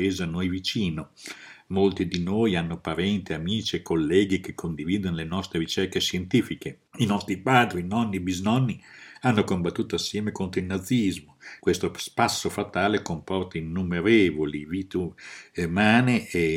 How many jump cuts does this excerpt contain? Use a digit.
2